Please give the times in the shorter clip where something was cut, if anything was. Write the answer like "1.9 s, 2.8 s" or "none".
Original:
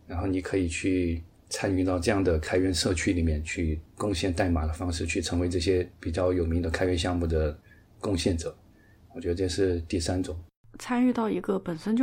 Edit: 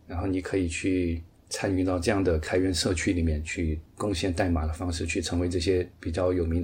none